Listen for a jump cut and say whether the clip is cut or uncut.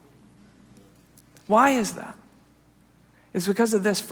uncut